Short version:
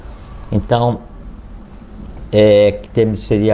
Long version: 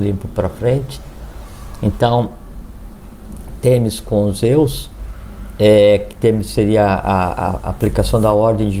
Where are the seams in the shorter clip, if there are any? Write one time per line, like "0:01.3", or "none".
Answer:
0:02.3